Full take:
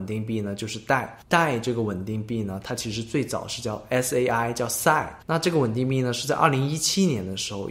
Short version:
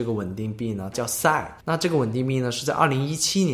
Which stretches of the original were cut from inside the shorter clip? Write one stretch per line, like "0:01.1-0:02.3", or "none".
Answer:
0:02.6-0:04.5